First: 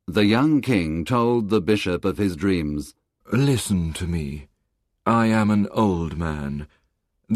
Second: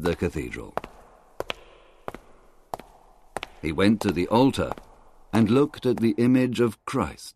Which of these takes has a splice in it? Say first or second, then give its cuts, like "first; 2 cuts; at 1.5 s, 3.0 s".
first; 1 cut; at 3.2 s